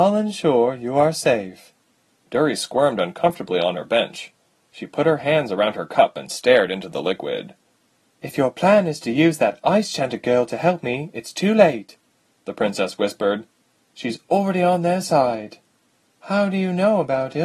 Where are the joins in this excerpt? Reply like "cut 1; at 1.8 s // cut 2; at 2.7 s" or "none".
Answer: none